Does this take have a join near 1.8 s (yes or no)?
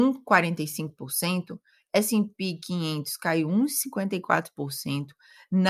no